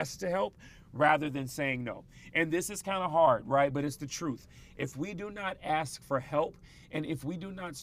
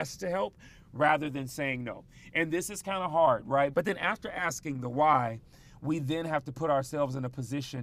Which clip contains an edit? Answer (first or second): second